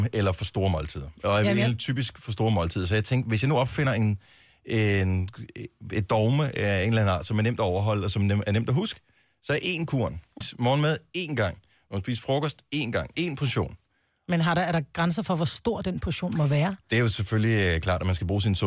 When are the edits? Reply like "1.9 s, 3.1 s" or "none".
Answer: 10.4 s